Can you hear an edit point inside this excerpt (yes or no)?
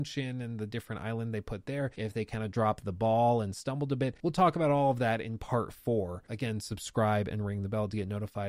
no